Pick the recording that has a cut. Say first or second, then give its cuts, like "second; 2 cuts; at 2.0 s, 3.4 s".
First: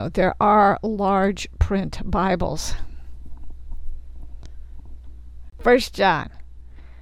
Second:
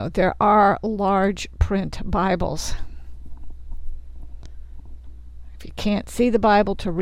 first; 1 cut; at 5.5 s